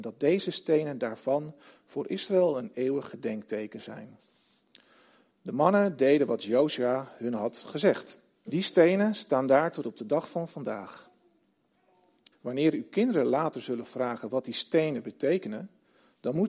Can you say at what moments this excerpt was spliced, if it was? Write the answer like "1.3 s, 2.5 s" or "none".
8.5 s, 12.3 s

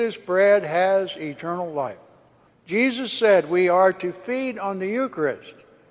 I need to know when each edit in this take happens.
2.5 s

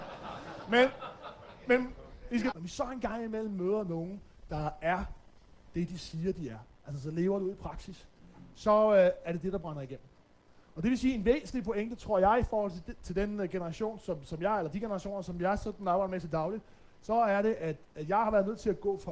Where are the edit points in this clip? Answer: 2.5 s

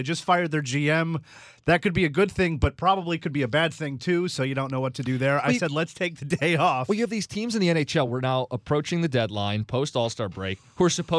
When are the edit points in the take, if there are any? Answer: none

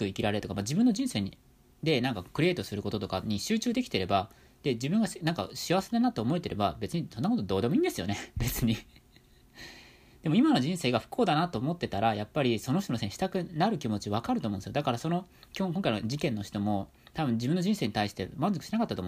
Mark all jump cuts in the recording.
none

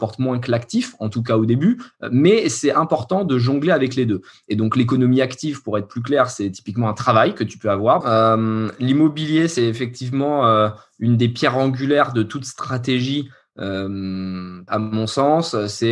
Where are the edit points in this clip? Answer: 8.0 s, 14.7 s

